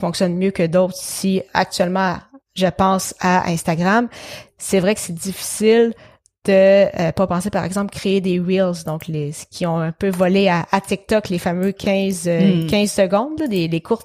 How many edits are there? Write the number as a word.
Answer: zero